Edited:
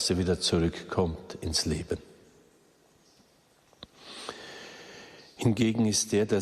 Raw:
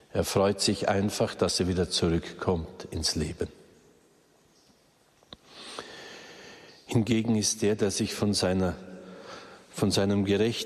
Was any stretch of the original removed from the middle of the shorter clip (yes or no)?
no